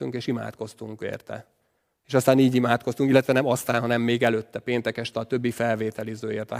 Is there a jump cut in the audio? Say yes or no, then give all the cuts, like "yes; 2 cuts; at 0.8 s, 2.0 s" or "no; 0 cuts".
yes; 1 cut; at 2.0 s